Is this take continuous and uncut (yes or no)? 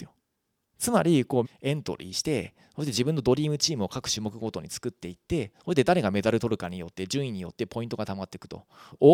no